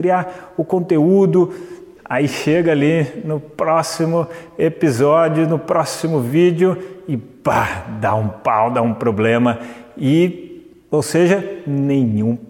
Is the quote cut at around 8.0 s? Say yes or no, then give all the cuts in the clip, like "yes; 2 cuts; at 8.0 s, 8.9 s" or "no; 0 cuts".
no; 1 cut; at 2.0 s